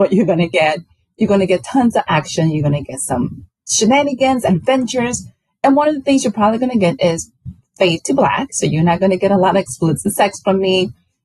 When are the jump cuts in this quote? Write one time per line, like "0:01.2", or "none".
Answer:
none